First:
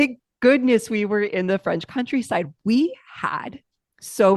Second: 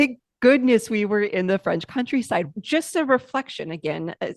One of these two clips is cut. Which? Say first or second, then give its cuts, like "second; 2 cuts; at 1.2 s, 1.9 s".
second; 1 cut; at 2.5 s